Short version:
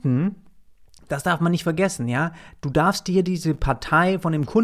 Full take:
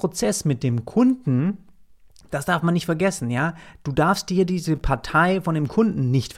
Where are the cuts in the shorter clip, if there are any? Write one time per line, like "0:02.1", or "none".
none